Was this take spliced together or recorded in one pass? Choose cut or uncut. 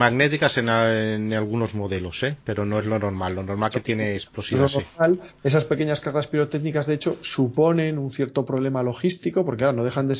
uncut